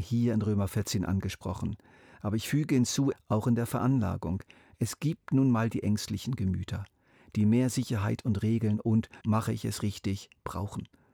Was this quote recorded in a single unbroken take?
no; 2 cuts; at 3.1 s, 9.2 s

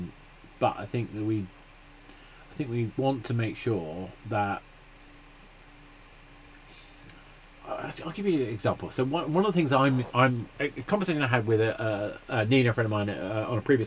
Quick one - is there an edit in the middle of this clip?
no; 0 cuts

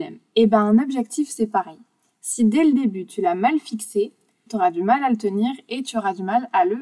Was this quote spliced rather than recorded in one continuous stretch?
yes; 1 cut; at 4.5 s

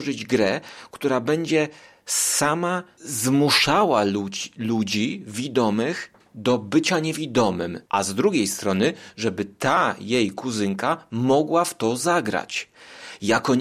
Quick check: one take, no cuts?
no; 1 cut; at 7.9 s

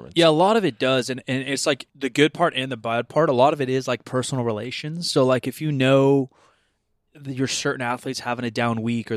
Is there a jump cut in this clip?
yes; 1 cut; at 1.9 s

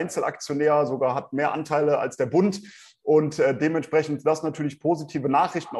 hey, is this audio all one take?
yes; 0 cuts

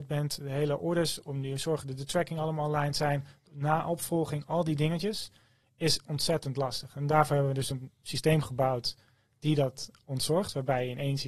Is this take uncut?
yes; 0 cuts

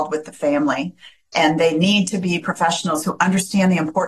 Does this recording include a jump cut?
no; 0 cuts

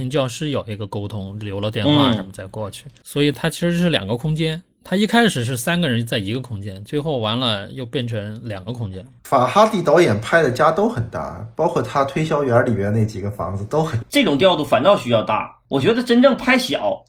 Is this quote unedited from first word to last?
no; 2 cuts; at 9.2 s, 14.0 s

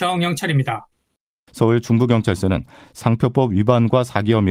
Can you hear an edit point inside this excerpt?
yes; 1 cut; at 1.5 s

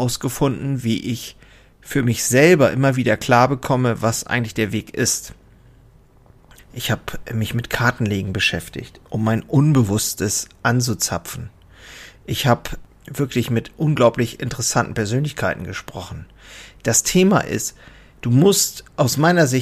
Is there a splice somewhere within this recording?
yes; 2 cuts; at 6.6 s, 9.1 s

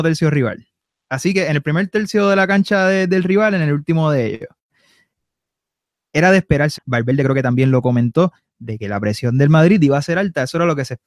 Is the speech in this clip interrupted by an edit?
yes; 1 cut; at 6.8 s

